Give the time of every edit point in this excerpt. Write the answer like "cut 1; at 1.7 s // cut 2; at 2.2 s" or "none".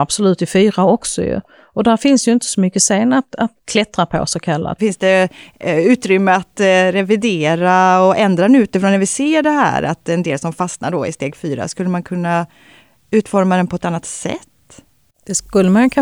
cut 1; at 3.5 s // cut 2; at 4.8 s